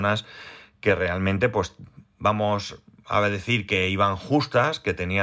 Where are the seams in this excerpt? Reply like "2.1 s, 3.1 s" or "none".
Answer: none